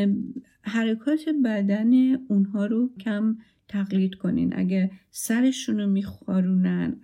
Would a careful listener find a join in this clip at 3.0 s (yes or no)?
yes